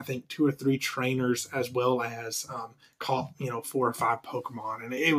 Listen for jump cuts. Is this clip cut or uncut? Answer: uncut